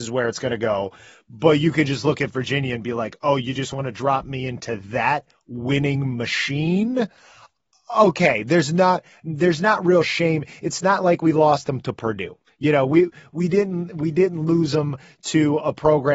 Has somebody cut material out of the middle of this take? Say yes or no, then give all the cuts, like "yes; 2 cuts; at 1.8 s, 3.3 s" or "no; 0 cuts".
no; 0 cuts